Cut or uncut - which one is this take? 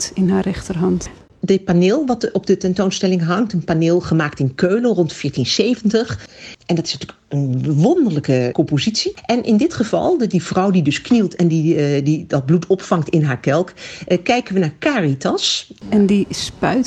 cut